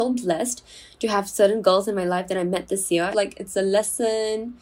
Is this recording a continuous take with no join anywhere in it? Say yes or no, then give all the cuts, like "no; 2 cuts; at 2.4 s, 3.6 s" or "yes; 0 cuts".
no; 1 cut; at 3.1 s